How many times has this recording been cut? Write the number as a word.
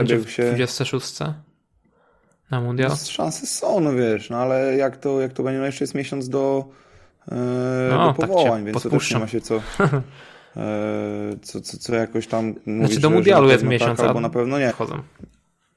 one